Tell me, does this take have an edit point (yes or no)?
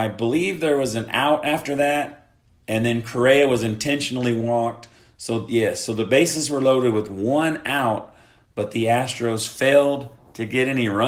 no